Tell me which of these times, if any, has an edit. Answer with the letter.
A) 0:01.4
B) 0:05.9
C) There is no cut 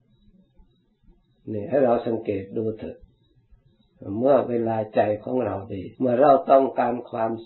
B